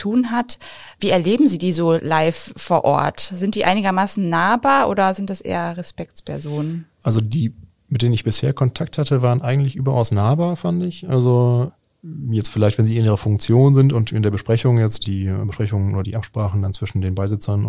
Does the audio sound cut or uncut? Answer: cut